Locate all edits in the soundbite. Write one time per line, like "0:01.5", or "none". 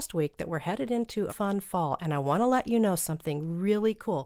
0:01.3